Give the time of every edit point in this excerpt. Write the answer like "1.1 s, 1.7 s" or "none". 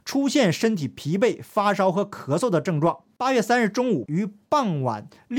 4.1 s

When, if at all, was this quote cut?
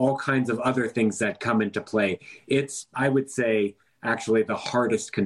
2.9 s

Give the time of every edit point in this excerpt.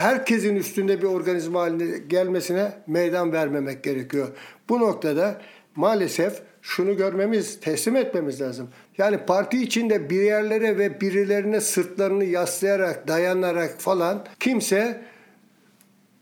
8.9 s, 14.3 s

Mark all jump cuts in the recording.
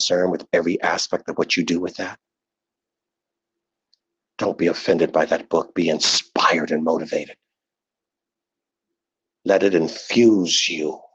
none

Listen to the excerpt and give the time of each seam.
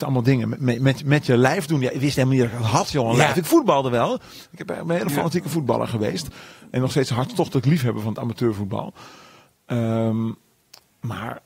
none

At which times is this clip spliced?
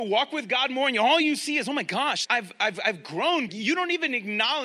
2.2 s, 3.5 s

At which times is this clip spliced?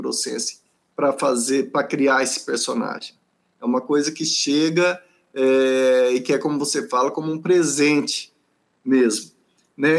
3.5 s

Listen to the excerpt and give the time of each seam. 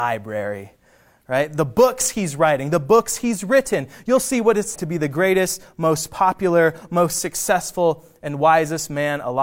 4.8 s

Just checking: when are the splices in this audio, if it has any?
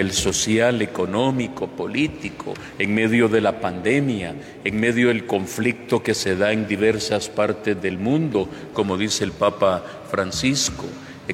8.7 s

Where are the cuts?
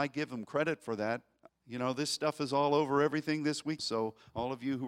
1.5 s, 3.8 s

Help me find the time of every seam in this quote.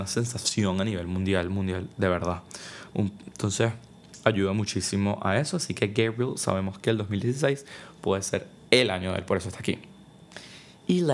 2.9 s

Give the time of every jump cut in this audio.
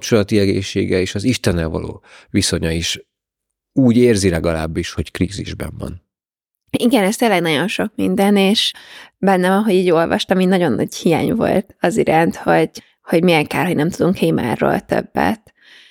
none

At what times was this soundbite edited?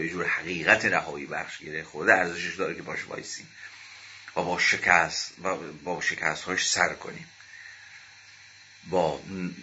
none

